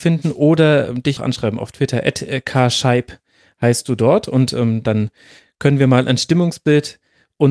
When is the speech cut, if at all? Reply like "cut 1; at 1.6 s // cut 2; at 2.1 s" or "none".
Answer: cut 1; at 1.2 s